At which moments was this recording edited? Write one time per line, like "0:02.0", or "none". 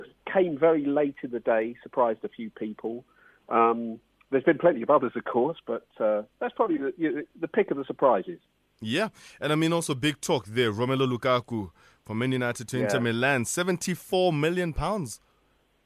none